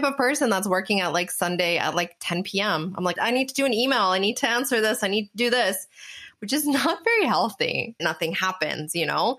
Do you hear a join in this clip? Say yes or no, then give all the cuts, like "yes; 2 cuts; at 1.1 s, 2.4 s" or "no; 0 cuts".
yes; 2 cuts; at 3.2 s, 8.0 s